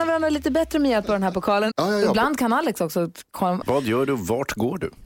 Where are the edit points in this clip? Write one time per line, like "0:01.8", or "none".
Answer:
0:01.7
0:03.6